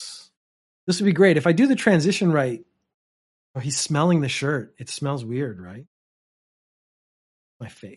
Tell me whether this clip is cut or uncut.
uncut